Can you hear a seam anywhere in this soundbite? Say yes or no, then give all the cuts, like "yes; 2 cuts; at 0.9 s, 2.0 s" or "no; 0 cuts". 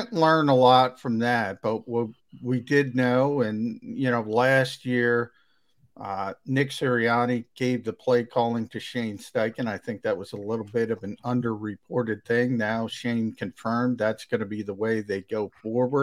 no; 0 cuts